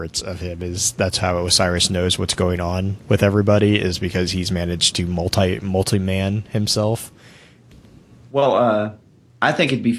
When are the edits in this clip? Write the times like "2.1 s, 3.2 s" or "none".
7.7 s